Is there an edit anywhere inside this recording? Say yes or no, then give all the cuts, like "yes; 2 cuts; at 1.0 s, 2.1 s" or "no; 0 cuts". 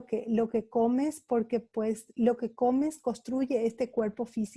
no; 0 cuts